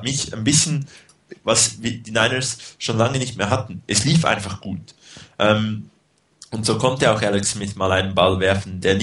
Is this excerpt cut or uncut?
cut